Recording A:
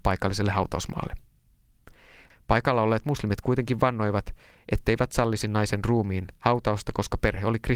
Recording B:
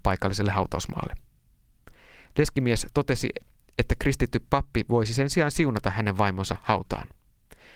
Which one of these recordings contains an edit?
A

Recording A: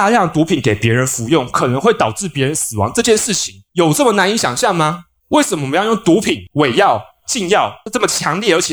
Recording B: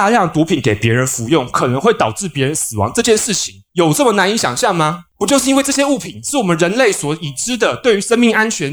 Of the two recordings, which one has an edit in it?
B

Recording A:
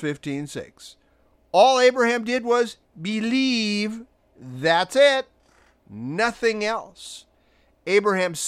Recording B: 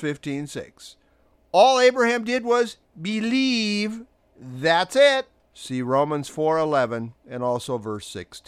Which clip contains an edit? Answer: B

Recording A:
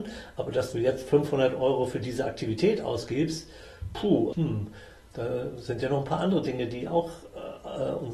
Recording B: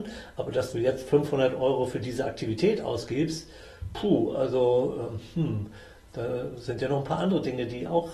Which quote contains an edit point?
A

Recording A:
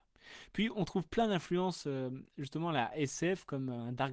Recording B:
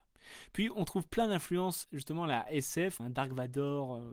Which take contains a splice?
B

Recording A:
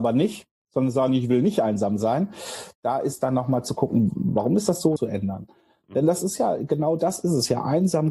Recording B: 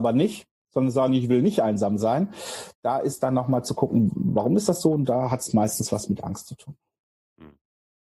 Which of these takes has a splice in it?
A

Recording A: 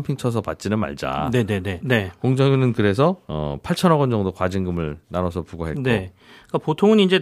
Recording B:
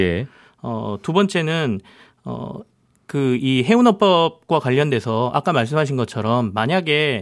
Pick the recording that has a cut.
A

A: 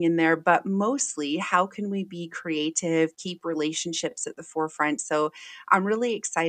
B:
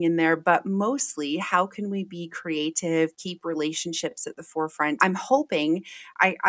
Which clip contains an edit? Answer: B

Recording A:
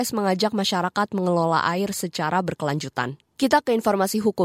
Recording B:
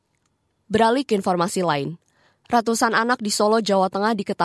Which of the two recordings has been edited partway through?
A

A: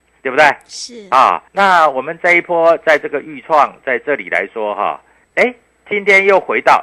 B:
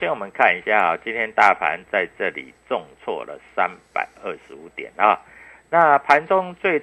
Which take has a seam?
A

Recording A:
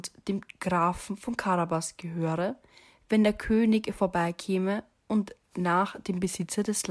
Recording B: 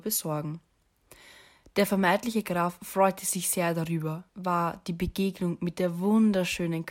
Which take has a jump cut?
B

